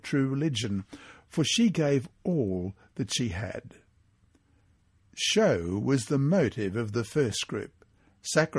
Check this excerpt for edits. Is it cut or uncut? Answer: uncut